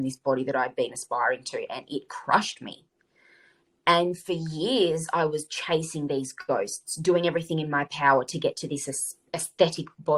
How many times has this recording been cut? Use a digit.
0